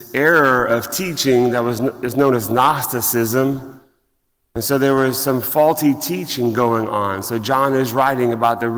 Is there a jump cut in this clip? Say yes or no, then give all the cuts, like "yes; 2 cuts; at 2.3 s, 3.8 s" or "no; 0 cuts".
no; 0 cuts